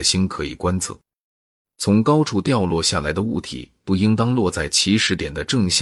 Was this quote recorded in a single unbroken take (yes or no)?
no